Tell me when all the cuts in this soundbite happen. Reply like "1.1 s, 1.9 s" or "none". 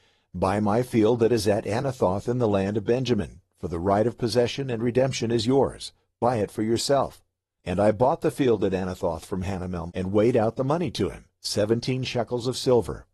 7.6 s, 9.9 s